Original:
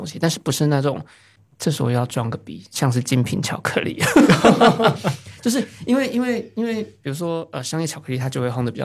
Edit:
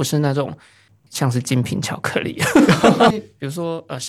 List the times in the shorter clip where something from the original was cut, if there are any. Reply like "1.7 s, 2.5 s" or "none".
1.1 s, 3.1 s